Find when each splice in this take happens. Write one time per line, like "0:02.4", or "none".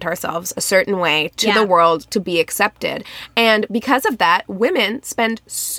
none